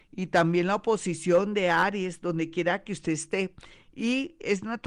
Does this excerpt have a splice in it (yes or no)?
no